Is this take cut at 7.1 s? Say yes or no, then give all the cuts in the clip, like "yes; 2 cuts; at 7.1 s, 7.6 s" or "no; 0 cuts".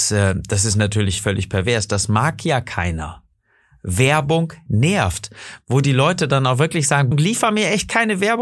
yes; 1 cut; at 7.1 s